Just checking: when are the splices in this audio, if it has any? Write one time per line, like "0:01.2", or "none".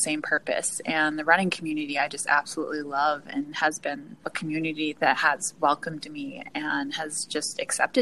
0:04.2